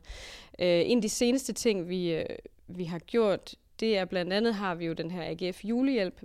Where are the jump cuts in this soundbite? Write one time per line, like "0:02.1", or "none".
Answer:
none